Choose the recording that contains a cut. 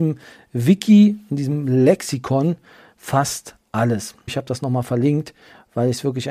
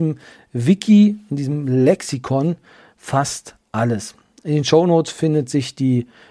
first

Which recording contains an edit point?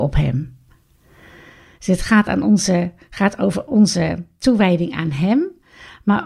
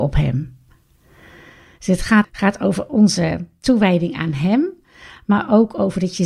second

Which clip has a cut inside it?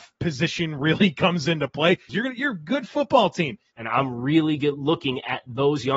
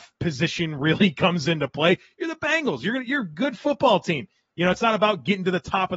first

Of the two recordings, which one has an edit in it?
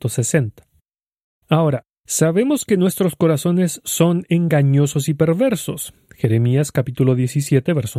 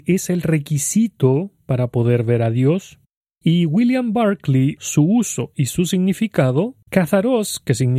second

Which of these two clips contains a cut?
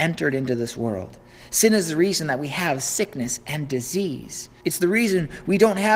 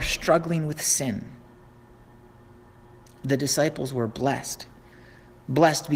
first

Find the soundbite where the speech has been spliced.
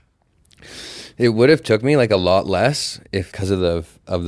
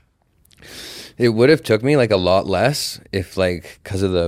first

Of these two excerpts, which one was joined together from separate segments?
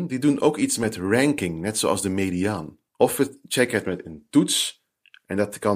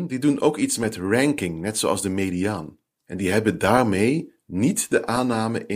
first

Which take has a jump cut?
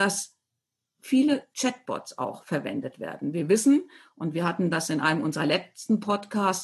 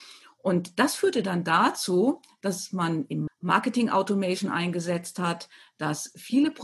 second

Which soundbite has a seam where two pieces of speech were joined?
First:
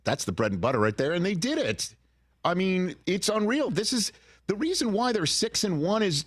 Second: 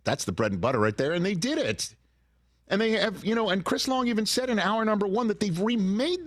first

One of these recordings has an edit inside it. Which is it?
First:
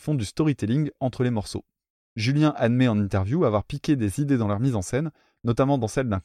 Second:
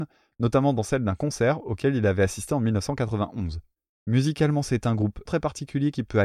second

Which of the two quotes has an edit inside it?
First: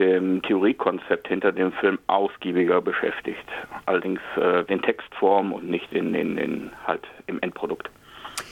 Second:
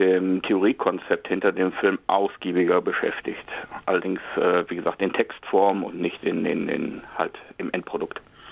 first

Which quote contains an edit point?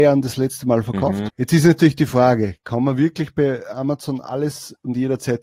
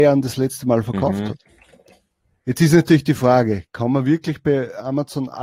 first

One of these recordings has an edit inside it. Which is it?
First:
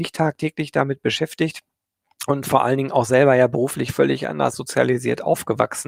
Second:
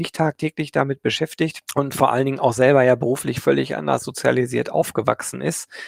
second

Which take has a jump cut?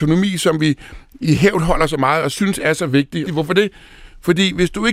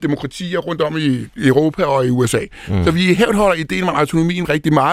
first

